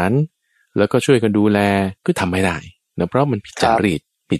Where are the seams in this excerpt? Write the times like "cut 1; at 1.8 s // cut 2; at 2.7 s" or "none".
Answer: cut 1; at 2.0 s

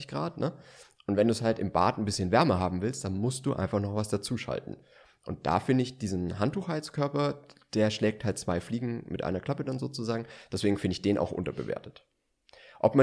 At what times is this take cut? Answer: none

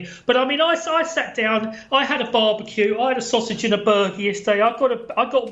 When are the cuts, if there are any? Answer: none

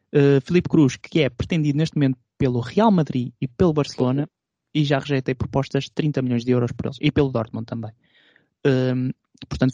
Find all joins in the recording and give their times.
none

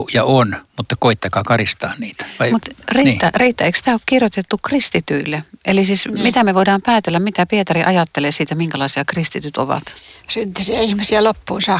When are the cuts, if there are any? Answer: none

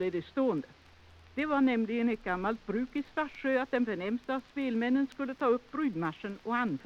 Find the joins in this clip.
none

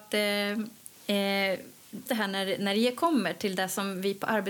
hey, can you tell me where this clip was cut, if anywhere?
cut 1; at 2.1 s

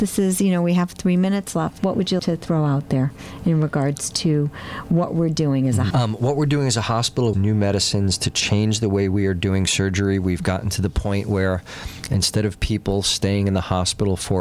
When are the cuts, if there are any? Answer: cut 1; at 2.2 s // cut 2; at 5.9 s // cut 3; at 7.3 s

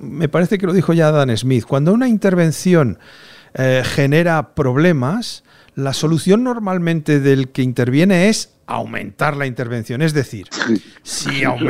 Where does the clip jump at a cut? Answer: none

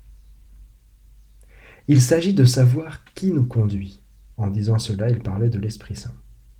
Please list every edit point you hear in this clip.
cut 1; at 4.3 s

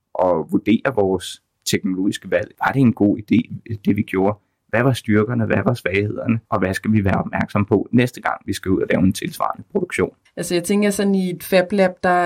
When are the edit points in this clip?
cut 1; at 6.4 s // cut 2; at 10.3 s

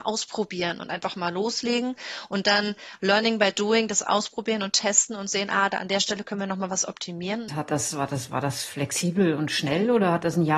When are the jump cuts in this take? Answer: cut 1; at 7.5 s

